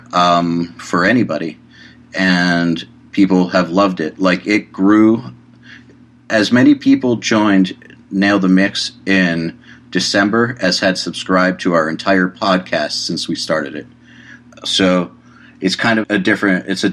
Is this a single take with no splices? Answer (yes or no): no